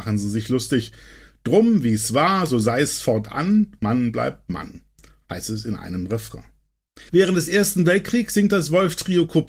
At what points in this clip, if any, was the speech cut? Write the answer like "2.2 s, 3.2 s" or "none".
3.8 s, 7.1 s